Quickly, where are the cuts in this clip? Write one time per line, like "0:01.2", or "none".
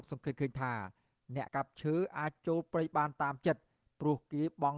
0:01.5